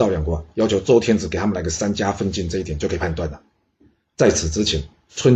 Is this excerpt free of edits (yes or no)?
yes